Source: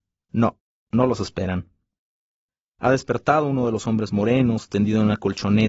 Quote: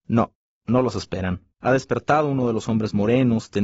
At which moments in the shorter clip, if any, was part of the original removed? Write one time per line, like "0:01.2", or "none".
0:01.5